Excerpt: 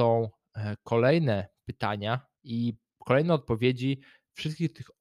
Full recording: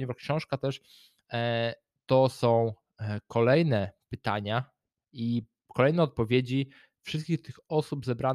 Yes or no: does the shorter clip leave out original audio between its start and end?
yes